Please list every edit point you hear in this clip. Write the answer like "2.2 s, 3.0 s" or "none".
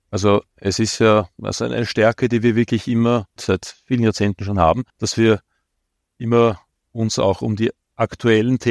3.4 s, 4.9 s